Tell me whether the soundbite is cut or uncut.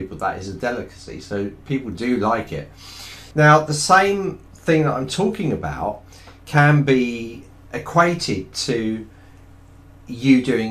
cut